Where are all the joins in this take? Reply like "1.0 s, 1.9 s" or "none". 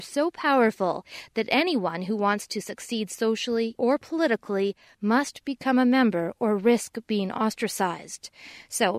3.8 s